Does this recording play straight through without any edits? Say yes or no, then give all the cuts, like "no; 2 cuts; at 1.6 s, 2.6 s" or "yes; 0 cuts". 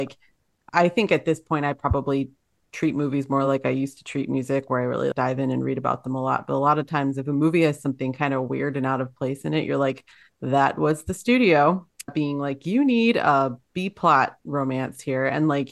yes; 0 cuts